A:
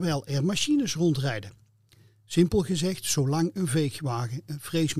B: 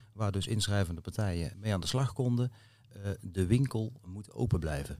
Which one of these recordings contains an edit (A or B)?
B